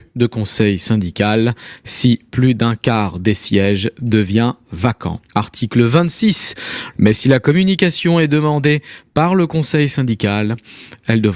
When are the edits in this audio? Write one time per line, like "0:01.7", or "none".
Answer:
0:05.3
0:06.9